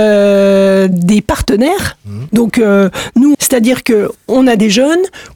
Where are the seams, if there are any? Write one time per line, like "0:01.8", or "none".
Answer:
0:02.3
0:03.3